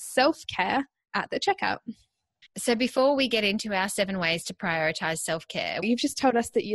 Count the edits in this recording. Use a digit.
1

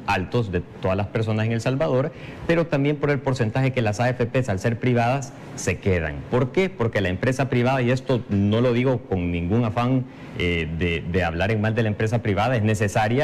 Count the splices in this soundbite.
0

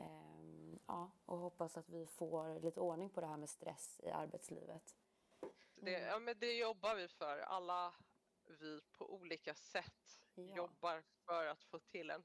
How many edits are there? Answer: 1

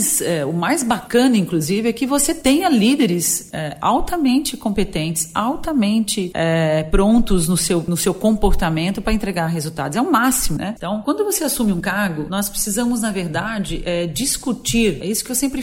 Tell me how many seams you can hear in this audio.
1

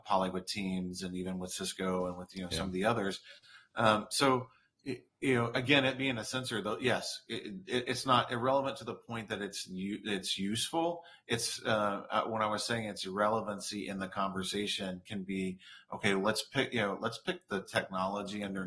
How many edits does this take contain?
0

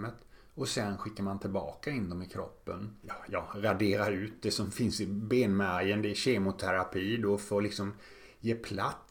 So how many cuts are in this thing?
1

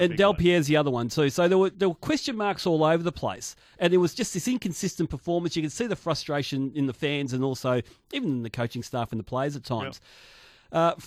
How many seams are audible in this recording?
0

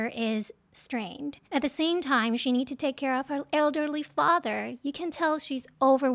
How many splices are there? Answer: 1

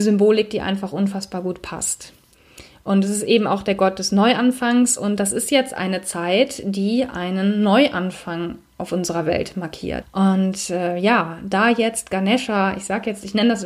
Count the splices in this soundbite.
1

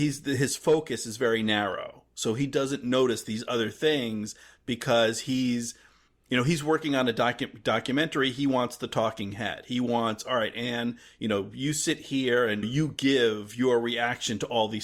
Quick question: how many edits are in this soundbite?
1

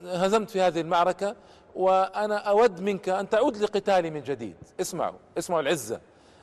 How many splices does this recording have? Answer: 0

